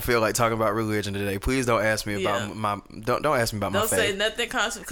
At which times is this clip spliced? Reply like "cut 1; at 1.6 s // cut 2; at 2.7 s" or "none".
none